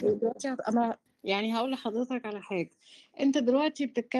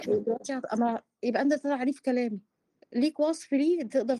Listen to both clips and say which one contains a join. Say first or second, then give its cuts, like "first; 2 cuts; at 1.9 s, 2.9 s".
first; 1 cut; at 1.1 s